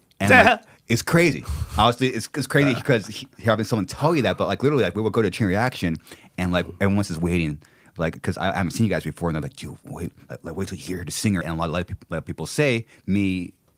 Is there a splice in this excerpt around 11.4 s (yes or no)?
yes